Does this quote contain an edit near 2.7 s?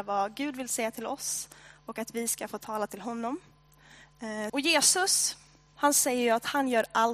no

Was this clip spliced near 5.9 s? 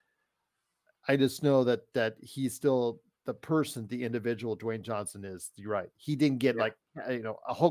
yes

